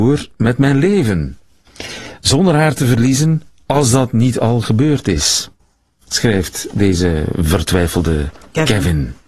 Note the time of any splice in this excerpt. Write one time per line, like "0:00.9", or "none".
none